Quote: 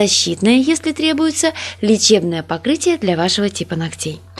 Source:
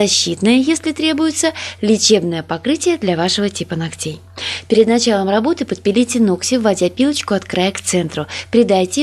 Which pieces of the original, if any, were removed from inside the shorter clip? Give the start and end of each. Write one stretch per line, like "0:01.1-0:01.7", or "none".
none